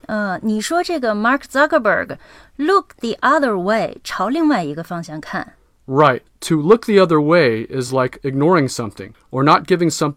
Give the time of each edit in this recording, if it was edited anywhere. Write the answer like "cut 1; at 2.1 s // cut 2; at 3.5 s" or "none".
none